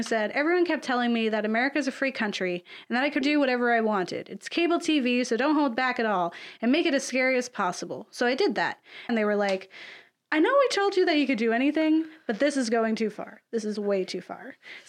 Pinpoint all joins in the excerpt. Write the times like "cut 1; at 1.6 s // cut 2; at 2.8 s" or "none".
cut 1; at 3.2 s // cut 2; at 9.1 s